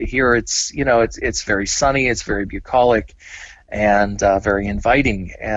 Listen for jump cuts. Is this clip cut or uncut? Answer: uncut